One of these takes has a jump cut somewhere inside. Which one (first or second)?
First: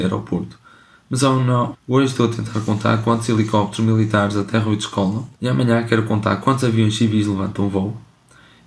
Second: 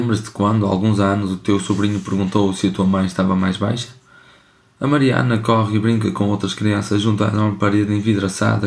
first